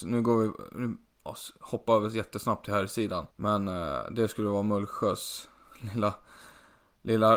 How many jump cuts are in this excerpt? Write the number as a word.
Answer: one